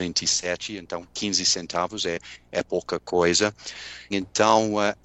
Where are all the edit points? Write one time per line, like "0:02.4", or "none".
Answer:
0:04.1